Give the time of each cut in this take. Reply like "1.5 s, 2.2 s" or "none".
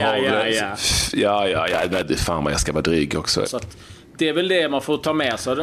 3.4 s